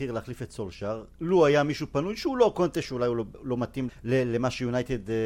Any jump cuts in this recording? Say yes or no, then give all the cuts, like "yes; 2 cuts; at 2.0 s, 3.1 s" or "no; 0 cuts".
yes; 1 cut; at 3.9 s